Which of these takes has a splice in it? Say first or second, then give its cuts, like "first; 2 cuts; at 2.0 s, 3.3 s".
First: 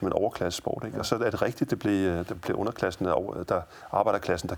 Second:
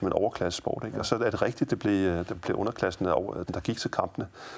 second; 1 cut; at 3.5 s